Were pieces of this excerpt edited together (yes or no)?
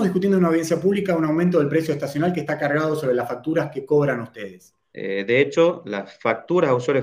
yes